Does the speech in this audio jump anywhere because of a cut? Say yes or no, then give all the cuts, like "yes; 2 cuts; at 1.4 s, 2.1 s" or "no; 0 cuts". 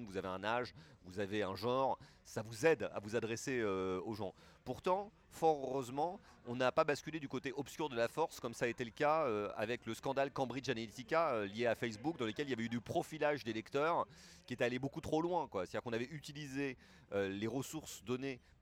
no; 0 cuts